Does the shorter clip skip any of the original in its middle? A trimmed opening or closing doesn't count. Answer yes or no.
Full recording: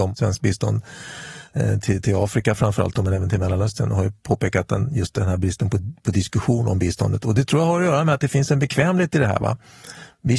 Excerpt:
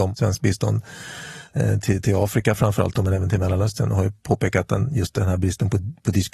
no